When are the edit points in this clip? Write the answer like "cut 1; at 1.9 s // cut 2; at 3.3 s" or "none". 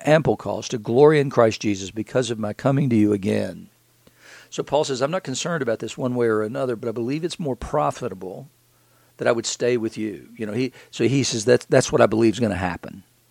cut 1; at 6.8 s

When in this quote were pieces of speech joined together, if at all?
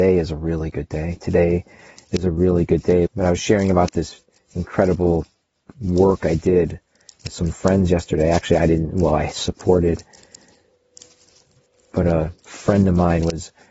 cut 1; at 3.1 s

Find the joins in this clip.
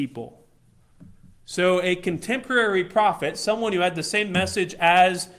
none

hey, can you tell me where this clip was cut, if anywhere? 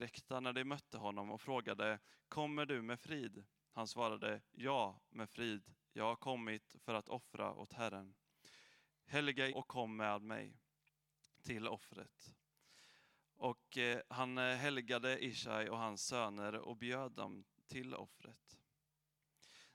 cut 1; at 9.5 s

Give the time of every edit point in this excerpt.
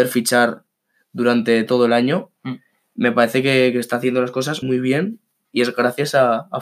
cut 1; at 4.6 s

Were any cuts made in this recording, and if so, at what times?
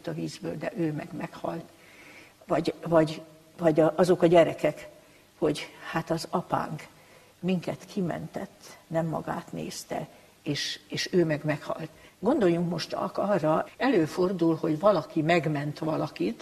cut 1; at 12.1 s // cut 2; at 13.7 s

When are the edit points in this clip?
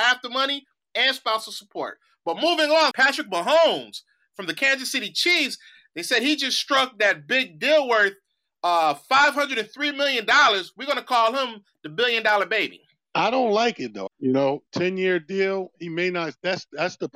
cut 1; at 2.9 s // cut 2; at 14.1 s

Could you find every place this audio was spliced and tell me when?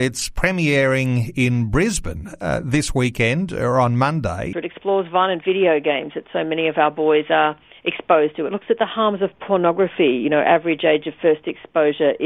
cut 1; at 4.5 s

